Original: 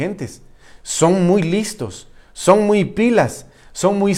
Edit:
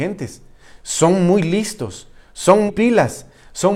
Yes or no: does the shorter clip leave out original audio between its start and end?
yes